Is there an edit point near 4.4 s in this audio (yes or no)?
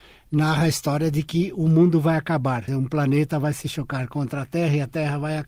no